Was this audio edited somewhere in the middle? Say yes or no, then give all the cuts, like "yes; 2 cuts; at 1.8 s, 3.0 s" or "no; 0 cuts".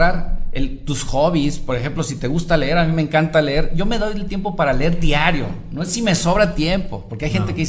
no; 0 cuts